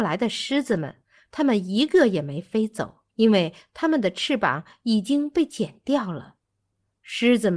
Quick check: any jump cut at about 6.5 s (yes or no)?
no